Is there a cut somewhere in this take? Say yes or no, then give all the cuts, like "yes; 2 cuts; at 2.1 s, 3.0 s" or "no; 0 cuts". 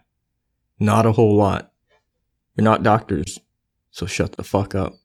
yes; 1 cut; at 2.4 s